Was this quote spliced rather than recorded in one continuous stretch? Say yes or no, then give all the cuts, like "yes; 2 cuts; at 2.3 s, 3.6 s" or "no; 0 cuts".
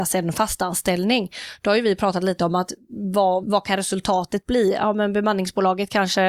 yes; 1 cut; at 3.4 s